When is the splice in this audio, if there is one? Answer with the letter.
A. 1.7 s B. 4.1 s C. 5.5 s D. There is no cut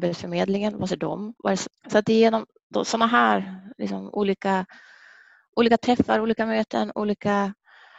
A